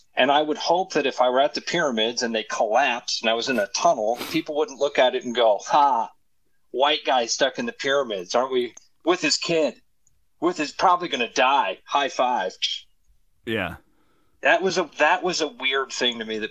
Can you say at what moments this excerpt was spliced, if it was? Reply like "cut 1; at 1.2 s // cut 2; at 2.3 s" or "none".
none